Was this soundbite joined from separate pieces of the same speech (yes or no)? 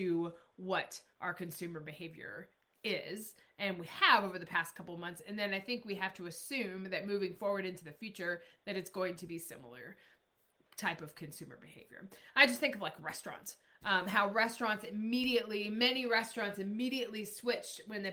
no